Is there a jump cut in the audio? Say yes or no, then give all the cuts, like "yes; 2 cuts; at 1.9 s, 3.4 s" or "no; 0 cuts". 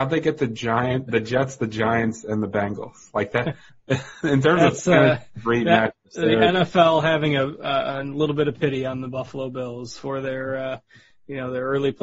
no; 0 cuts